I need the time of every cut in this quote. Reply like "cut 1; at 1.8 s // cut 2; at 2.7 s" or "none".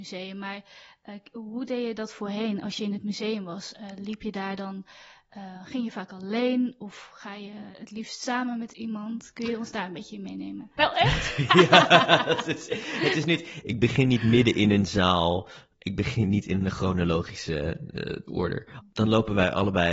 cut 1; at 10.8 s // cut 2; at 13.6 s // cut 3; at 18.8 s

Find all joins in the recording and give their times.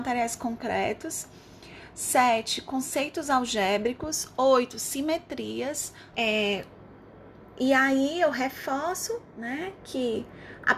cut 1; at 6.1 s

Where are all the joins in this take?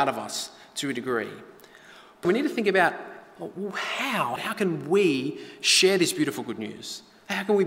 cut 1; at 2.2 s // cut 2; at 4.4 s

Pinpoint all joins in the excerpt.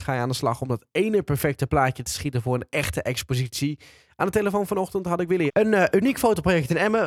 cut 1; at 5.5 s

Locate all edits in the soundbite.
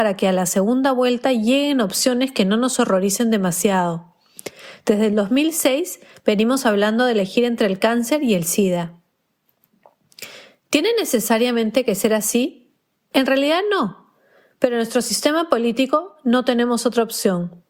none

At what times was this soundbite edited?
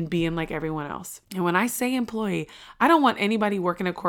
cut 1; at 1.2 s

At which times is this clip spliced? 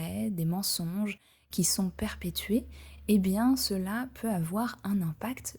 none

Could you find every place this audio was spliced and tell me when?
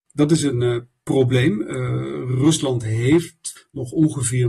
none

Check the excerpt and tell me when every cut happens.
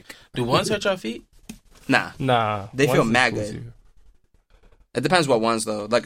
none

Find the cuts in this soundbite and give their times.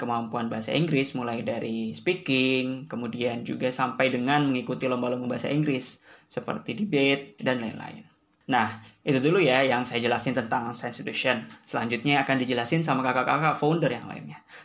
cut 1; at 7.4 s

